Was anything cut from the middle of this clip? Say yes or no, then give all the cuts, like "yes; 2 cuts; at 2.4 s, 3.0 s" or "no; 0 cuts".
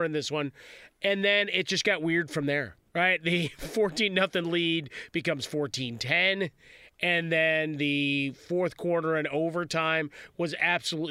yes; 1 cut; at 2.9 s